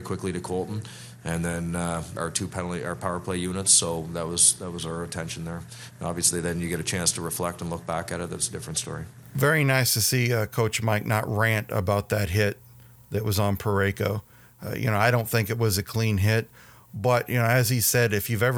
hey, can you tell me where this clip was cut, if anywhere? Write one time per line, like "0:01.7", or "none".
0:02.2